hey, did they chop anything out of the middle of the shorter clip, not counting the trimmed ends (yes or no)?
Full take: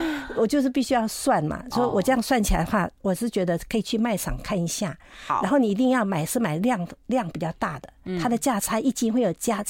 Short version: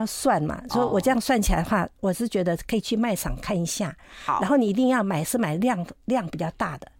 no